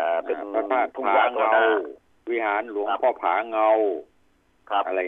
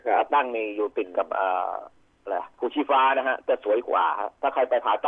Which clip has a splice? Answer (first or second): second